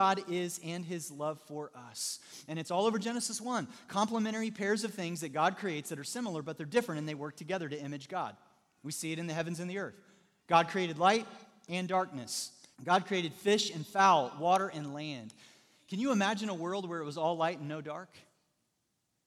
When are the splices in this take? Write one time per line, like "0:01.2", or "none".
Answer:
0:12.7